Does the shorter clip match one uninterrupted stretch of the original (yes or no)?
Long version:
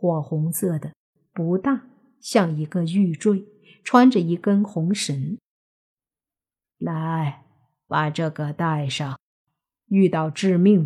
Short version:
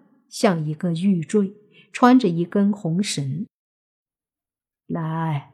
yes